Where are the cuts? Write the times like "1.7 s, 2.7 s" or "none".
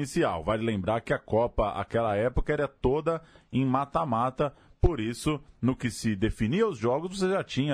none